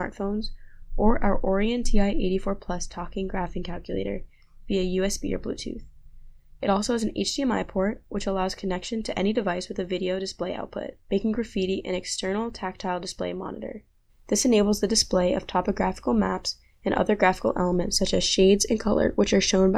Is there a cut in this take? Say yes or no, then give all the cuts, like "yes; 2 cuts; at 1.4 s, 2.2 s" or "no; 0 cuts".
yes; 2 cuts; at 11.0 s, 14.1 s